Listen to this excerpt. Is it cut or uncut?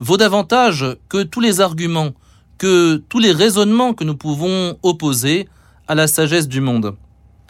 uncut